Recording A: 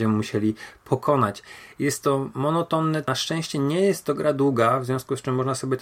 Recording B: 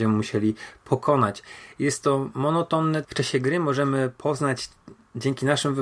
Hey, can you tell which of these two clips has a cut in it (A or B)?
B